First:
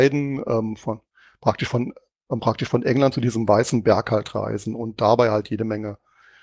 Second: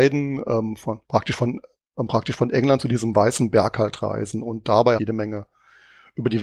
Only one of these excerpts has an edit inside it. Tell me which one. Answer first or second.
second